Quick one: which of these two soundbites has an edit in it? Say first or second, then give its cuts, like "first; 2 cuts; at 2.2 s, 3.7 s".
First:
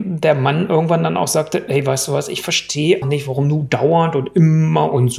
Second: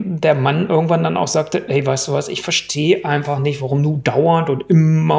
first; 1 cut; at 3.0 s